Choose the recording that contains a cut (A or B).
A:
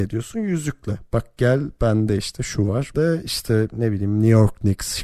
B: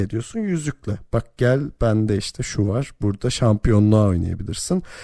A